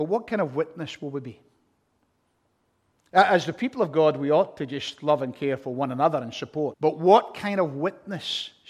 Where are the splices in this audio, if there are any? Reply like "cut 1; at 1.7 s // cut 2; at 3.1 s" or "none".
cut 1; at 6.7 s